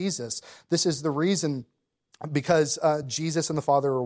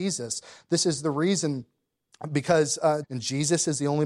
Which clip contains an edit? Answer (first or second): second